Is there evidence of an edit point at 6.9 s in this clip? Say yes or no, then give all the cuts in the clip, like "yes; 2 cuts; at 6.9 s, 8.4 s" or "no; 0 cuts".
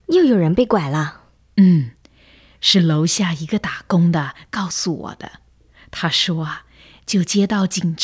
yes; 1 cut; at 6.9 s